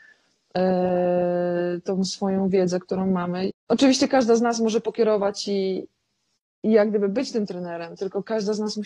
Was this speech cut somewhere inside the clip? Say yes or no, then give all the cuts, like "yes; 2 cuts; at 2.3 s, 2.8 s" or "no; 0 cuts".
yes; 1 cut; at 3.5 s